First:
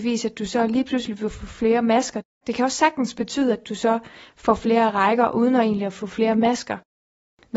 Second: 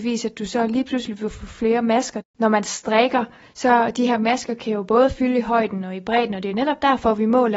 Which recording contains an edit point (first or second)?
second